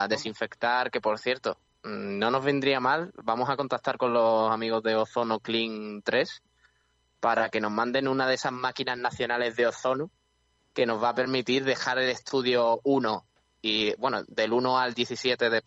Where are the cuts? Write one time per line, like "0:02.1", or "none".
none